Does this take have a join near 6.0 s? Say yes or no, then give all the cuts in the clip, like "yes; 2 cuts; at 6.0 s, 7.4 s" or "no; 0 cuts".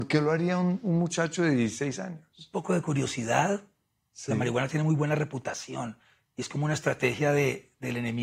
no; 0 cuts